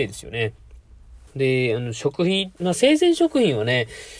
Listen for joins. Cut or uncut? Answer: cut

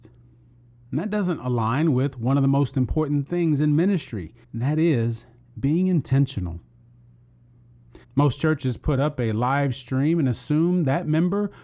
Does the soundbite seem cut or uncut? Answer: cut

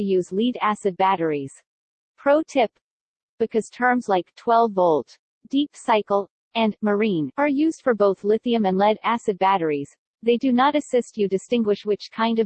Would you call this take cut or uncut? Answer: uncut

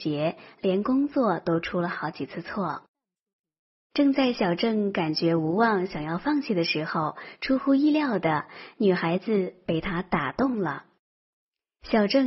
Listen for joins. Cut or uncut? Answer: uncut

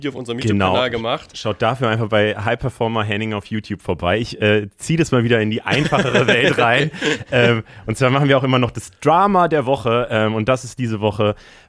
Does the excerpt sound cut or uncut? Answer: uncut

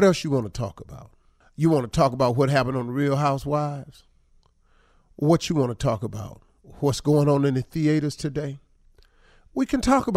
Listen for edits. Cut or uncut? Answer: uncut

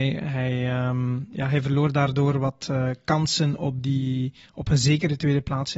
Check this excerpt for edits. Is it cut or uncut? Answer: uncut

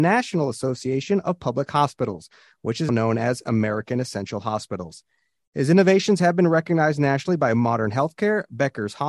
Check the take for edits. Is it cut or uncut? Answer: cut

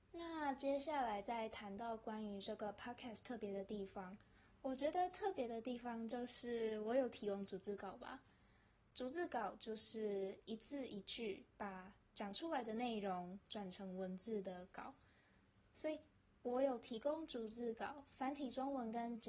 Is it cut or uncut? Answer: uncut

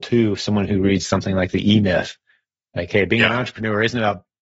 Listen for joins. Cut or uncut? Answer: uncut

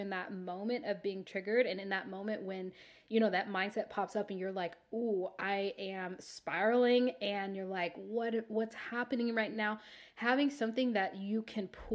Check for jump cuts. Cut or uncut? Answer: uncut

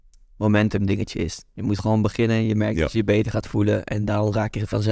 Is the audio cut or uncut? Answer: uncut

